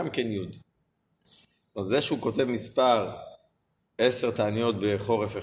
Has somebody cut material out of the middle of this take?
no; 0 cuts

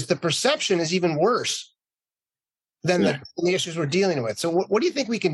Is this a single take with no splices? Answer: yes; 0 cuts

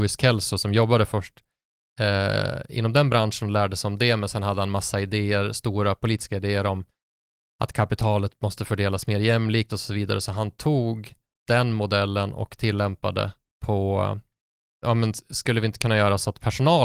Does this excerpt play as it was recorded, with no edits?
yes; 0 cuts

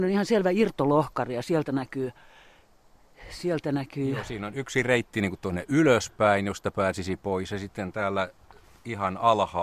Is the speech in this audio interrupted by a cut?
no; 0 cuts

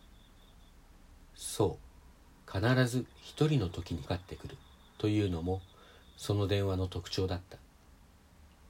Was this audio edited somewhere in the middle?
yes; 1 cut; at 4.1 s

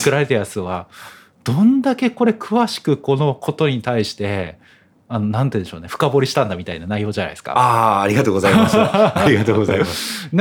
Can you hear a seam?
no; 0 cuts

